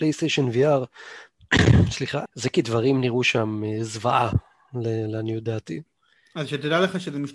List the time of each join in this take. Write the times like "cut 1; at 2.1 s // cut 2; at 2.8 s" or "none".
cut 1; at 2.2 s